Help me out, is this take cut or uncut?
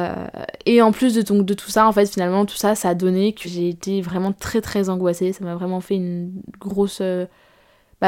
cut